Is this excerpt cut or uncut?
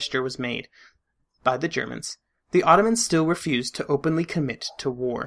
uncut